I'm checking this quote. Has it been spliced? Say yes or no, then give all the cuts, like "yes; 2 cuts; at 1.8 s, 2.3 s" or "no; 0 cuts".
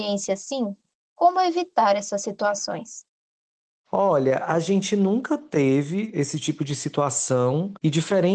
no; 0 cuts